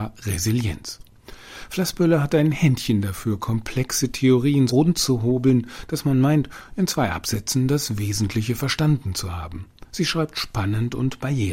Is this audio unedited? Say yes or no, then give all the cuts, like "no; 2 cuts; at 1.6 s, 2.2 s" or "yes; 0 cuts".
no; 1 cut; at 4.7 s